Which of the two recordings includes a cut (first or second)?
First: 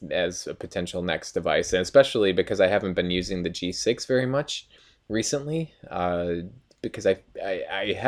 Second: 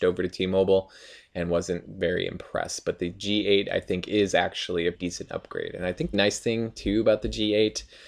second